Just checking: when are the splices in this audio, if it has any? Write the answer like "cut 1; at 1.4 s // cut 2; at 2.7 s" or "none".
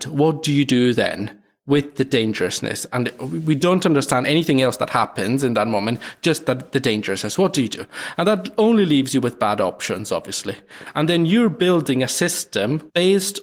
none